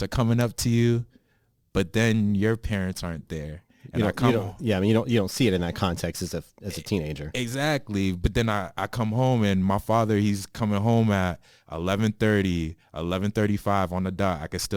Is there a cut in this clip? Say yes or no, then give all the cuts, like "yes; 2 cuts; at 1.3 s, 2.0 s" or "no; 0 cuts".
no; 0 cuts